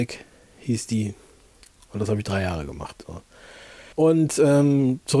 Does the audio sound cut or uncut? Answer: cut